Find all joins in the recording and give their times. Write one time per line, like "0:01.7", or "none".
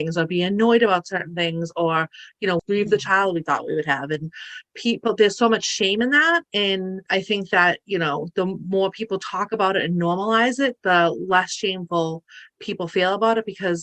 0:02.6